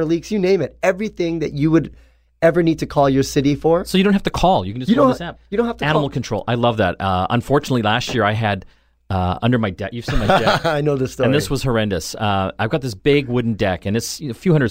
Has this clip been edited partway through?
no; 0 cuts

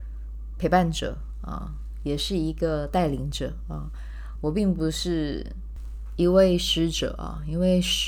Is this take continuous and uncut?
yes; 0 cuts

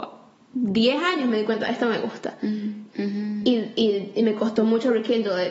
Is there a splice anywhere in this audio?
yes; 1 cut; at 2.9 s

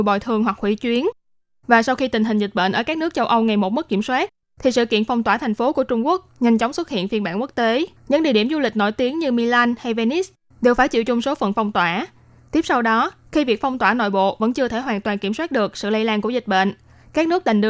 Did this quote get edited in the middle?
yes; 2 cuts; at 4.4 s, 8.0 s

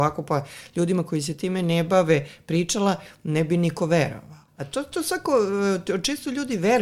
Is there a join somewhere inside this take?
yes; 1 cut; at 4.5 s

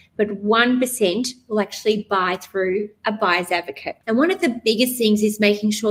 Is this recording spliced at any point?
yes; 1 cut; at 4.0 s

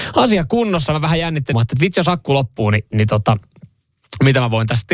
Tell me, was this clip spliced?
yes; 1 cut; at 1.5 s

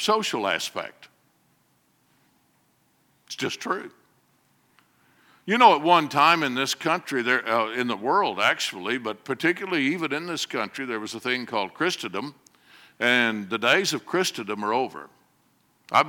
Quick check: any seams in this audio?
no; 0 cuts

